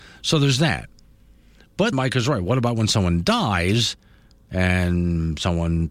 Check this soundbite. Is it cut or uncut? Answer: cut